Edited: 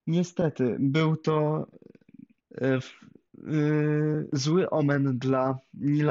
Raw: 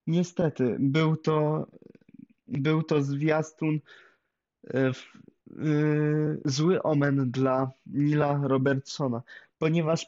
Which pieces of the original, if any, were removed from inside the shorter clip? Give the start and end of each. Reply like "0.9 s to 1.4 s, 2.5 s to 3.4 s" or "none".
2.4 s to 4.5 s